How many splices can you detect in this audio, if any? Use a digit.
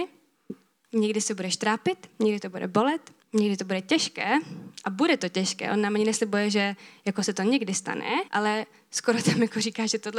2